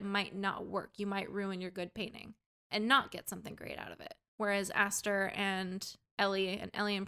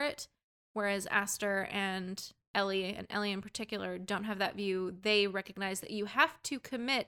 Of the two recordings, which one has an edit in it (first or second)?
first